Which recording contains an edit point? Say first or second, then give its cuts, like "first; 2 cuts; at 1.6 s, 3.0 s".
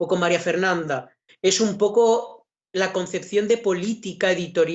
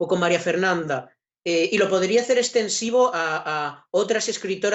first; 1 cut; at 1.3 s